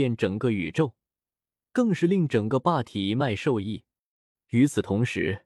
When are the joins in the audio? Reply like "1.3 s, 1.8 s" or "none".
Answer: 4.3 s

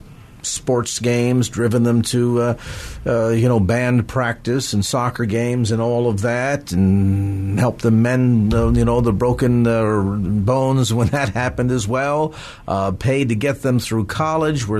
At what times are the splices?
none

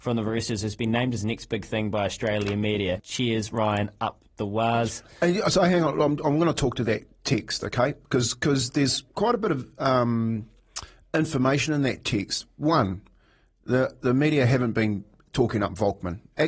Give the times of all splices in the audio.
3.0 s

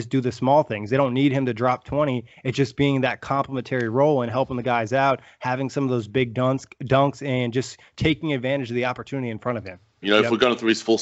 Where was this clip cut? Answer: 10.0 s

